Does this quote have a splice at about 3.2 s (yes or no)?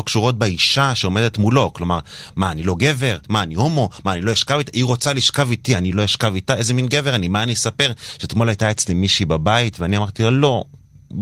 yes